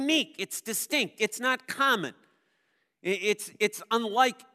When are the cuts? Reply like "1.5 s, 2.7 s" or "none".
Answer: 1.2 s